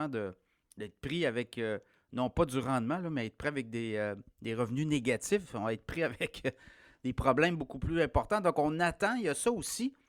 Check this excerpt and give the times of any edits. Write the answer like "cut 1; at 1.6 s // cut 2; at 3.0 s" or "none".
none